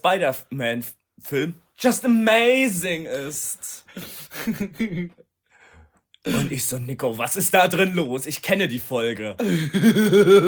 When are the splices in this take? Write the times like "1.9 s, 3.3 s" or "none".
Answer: none